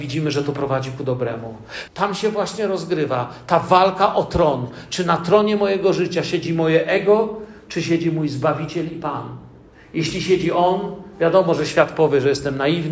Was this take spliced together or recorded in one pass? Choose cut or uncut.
cut